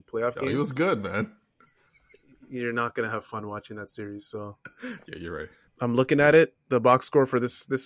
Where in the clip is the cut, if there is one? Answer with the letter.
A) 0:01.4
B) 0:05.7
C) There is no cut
B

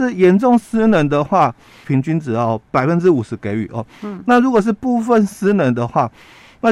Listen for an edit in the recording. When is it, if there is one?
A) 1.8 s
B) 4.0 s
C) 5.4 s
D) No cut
A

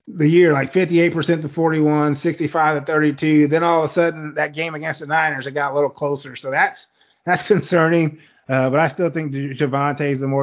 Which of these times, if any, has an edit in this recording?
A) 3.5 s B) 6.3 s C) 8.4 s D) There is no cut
D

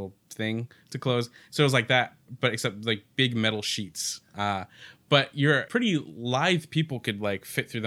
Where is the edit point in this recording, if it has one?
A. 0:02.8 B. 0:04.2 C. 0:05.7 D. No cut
C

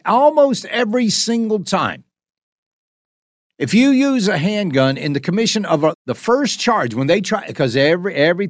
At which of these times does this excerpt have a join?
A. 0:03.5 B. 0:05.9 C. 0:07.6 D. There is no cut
B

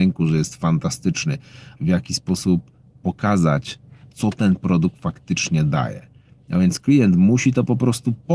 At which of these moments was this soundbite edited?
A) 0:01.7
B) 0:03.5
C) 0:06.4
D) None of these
A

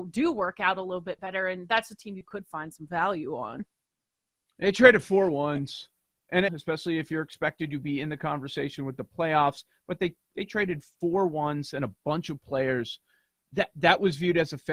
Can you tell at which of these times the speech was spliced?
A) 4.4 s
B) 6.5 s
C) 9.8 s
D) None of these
B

